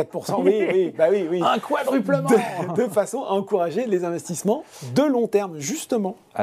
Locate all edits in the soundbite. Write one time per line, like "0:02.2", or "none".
none